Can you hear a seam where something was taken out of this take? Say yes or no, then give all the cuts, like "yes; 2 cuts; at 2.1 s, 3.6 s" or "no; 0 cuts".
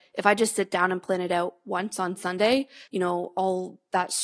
yes; 1 cut; at 2.9 s